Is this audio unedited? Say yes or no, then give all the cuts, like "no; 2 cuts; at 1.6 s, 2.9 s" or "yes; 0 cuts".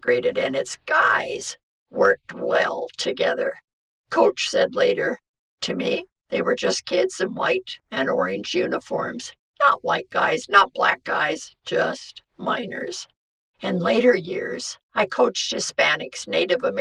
yes; 0 cuts